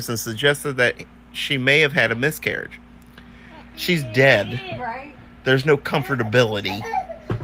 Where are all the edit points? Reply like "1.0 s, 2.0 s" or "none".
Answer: 3.7 s